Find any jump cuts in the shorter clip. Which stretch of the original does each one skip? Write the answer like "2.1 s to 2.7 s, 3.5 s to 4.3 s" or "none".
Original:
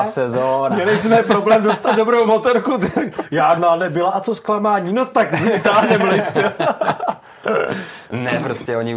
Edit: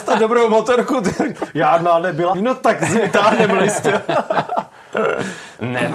4.1 s to 4.9 s